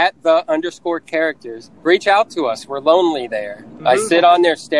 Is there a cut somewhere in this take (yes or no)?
yes